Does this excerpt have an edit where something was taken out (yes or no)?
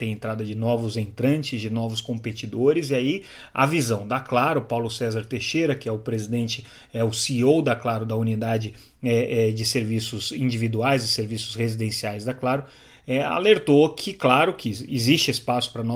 no